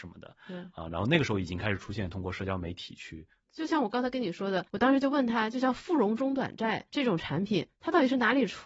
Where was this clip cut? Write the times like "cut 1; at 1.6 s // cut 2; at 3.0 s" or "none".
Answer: cut 1; at 3.4 s